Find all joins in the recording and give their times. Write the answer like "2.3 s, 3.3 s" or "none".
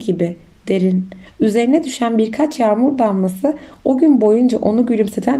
1.3 s

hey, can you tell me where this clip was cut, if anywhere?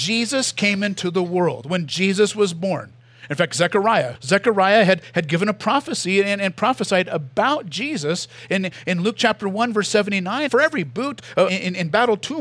4.1 s, 10.5 s, 11.5 s

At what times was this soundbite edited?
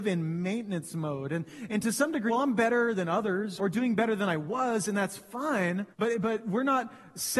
2.3 s, 3.6 s, 5.9 s

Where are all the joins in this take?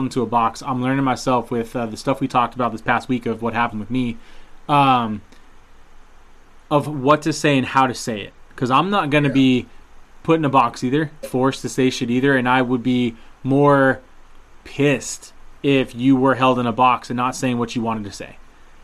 11.2 s

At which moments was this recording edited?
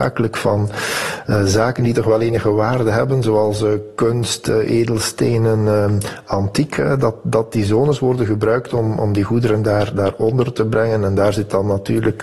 none

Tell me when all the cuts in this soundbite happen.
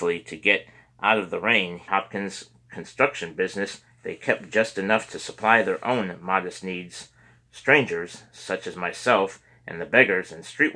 1.9 s

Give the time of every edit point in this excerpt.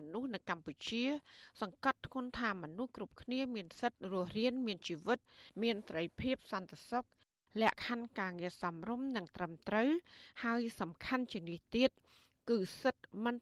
7.7 s

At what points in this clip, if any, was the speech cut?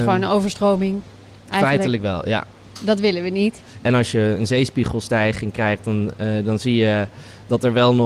3.8 s

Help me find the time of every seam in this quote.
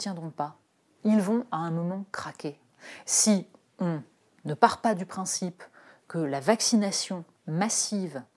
none

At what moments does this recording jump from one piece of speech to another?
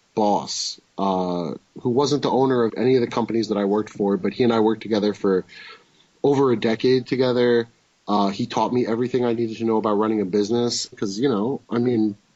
2.7 s, 10.9 s

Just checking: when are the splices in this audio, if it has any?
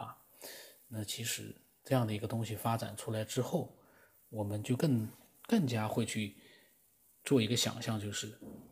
none

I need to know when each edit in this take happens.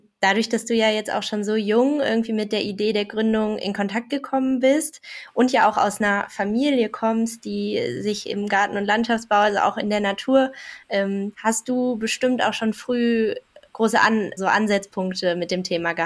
11.3 s, 14.4 s

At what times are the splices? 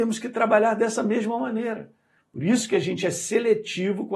2.2 s

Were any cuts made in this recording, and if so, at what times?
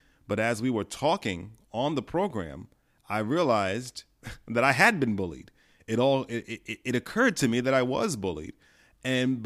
none

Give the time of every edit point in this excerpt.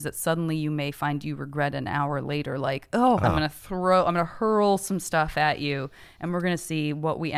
3.2 s

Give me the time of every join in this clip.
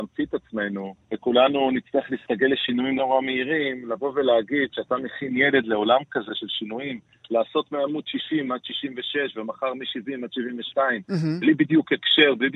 1.0 s, 3.0 s, 7.2 s

